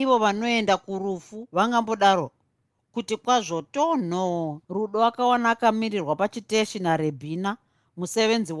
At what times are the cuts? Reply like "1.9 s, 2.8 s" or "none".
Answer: 4.6 s